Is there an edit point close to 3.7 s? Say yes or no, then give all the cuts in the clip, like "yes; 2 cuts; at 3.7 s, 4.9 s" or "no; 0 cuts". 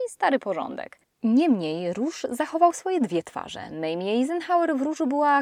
no; 0 cuts